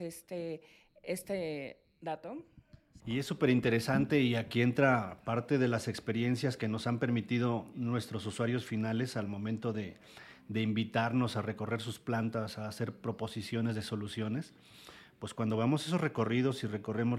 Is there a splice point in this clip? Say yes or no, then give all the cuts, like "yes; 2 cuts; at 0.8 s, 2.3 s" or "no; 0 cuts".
yes; 1 cut; at 3.0 s